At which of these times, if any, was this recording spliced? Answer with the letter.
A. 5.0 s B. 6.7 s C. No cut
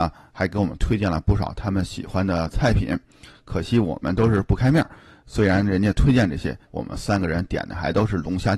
B